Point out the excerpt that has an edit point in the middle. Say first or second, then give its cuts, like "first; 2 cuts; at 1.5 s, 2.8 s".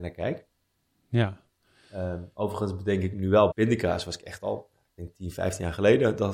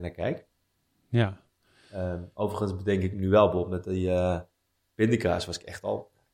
first; 1 cut; at 3.5 s